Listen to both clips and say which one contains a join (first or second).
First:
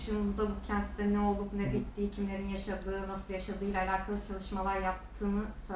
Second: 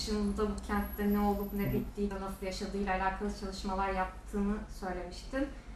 second